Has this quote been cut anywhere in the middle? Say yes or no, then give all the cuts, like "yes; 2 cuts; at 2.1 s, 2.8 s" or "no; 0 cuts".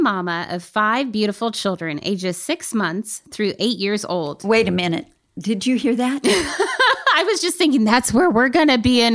no; 0 cuts